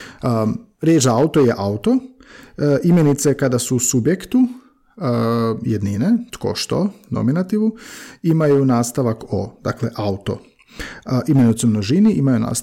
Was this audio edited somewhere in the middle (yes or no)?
no